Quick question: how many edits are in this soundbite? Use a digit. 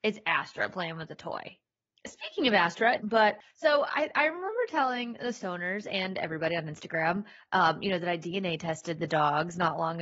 1